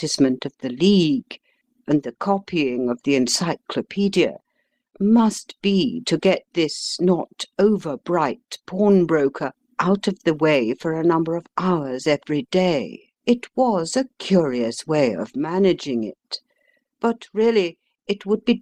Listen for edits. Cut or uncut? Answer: cut